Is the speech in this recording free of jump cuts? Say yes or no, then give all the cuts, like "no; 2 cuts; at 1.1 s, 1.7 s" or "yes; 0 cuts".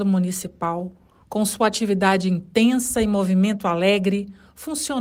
yes; 0 cuts